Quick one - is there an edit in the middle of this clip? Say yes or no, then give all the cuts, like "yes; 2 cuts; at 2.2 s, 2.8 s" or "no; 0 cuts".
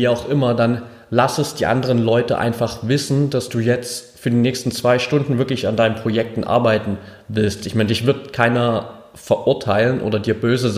no; 0 cuts